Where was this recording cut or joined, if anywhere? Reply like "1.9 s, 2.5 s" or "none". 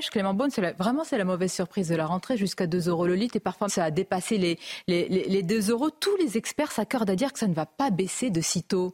3.7 s